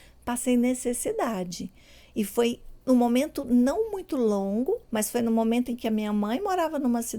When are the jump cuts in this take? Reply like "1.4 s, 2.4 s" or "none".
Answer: 4.9 s